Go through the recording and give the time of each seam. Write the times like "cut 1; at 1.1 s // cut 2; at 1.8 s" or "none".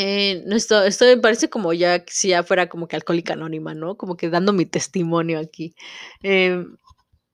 none